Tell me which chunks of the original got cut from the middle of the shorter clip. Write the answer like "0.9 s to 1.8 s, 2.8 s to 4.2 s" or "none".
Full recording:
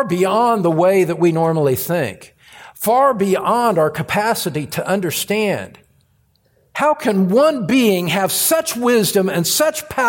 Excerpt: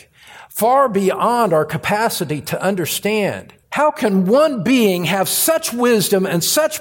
5.9 s to 6.7 s